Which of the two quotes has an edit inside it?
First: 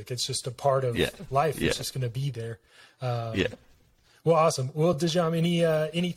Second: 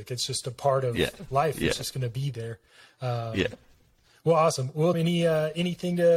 second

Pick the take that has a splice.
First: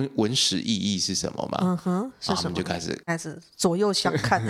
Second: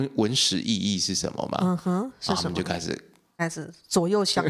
first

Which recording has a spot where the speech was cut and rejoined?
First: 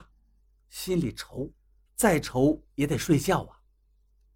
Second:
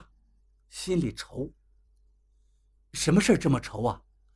first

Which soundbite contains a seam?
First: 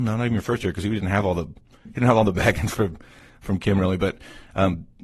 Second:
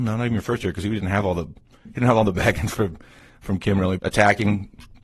second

